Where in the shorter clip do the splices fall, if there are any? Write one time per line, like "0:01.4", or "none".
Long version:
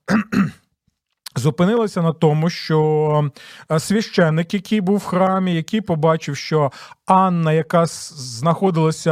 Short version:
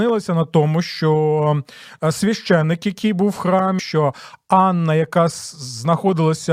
0:03.8